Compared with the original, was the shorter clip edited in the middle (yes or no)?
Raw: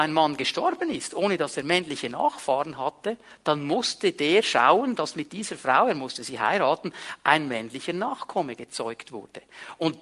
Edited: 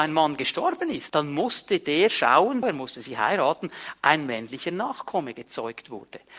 yes